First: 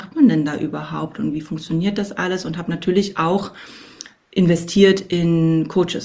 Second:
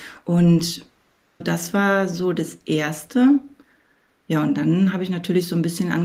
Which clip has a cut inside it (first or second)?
second